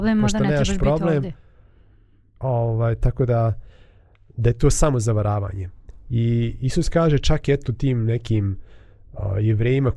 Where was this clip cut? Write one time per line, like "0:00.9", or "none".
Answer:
none